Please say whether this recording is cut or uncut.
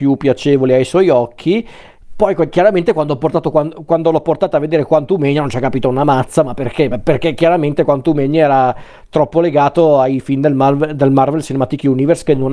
uncut